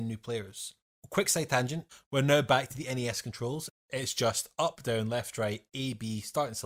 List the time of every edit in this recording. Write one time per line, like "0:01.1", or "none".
none